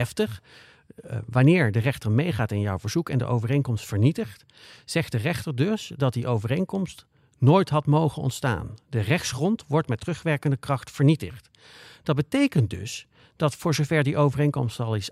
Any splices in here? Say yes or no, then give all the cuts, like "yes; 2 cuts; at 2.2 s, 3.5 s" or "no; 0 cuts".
no; 0 cuts